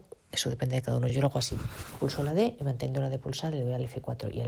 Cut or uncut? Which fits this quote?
uncut